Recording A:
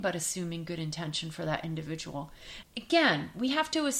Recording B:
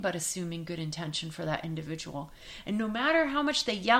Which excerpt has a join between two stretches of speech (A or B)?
A